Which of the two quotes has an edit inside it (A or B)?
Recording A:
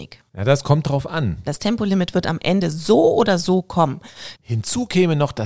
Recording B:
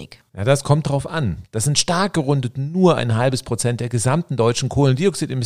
A